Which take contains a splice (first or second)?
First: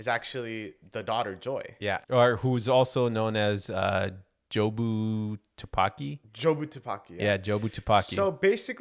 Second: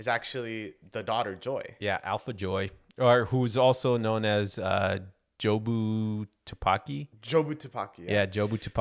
first